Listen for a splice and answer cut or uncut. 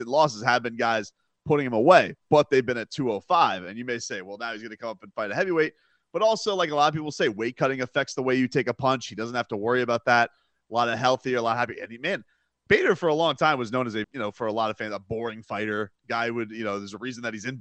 cut